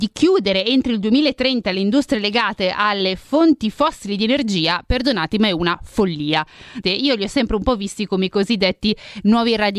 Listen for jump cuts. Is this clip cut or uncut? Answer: cut